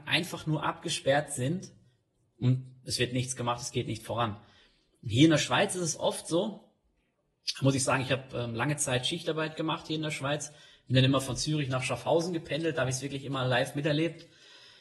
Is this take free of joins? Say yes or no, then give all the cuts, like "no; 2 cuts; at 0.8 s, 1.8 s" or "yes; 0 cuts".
yes; 0 cuts